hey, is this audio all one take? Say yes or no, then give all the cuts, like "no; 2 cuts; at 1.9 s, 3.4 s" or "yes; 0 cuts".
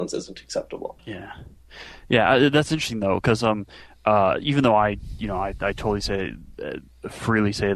no; 1 cut; at 1.0 s